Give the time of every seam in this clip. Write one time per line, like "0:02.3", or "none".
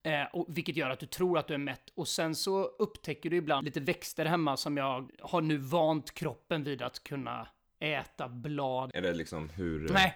0:05.1
0:08.9